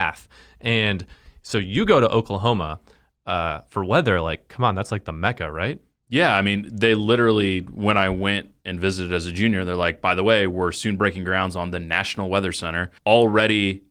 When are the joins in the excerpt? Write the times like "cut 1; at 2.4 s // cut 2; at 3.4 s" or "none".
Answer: cut 1; at 13.0 s